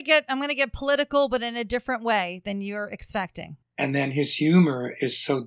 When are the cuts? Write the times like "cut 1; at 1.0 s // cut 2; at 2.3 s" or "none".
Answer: cut 1; at 3.6 s